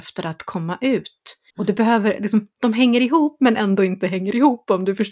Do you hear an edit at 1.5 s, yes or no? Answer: yes